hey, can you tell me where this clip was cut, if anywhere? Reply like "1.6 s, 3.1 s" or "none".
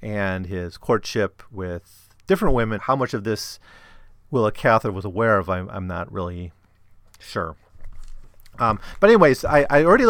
2.8 s